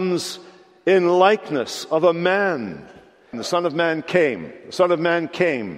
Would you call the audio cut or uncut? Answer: cut